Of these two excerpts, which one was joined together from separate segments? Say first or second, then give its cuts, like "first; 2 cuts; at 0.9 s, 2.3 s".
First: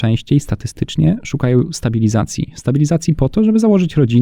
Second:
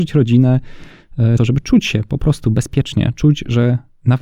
second; 1 cut; at 1.4 s